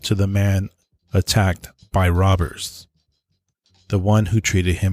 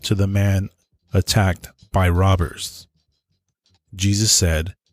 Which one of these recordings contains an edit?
second; 1 cut; at 3.7 s

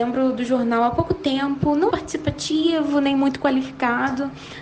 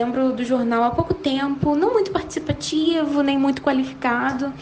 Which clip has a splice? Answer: first; 1 cut; at 1.9 s

